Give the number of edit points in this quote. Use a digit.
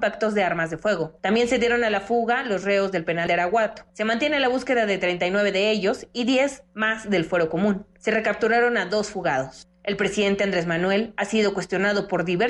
1